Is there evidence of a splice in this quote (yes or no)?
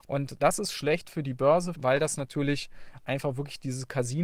yes